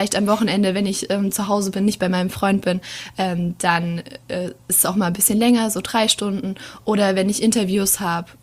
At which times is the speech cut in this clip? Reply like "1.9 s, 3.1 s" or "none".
none

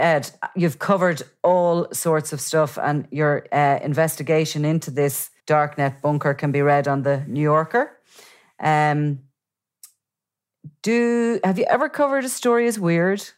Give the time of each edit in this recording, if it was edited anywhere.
5.4 s

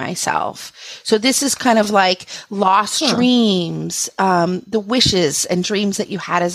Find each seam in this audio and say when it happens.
none

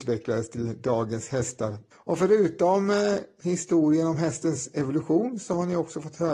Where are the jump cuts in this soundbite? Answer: 1.9 s

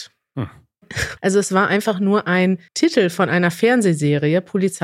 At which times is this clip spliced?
1.2 s, 2.7 s

